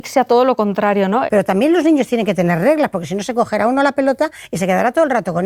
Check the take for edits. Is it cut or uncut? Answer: cut